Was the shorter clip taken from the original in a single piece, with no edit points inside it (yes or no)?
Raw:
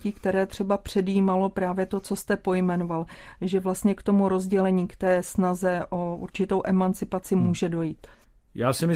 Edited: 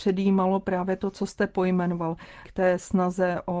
no